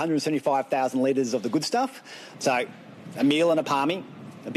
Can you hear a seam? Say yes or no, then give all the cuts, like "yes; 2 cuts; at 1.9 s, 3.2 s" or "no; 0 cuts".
no; 0 cuts